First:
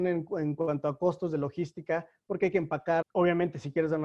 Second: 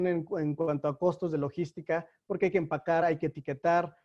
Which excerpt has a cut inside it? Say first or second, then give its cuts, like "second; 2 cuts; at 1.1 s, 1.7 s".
first; 1 cut; at 3.0 s